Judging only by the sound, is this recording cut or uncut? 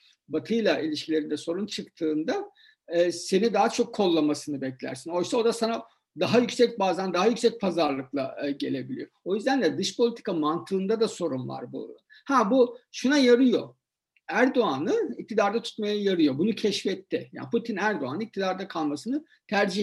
uncut